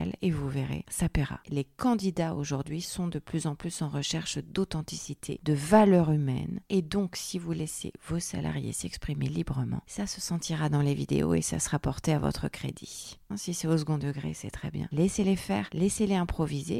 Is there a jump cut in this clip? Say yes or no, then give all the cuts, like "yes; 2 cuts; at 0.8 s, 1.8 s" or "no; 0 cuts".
yes; 2 cuts; at 6.6 s, 13.3 s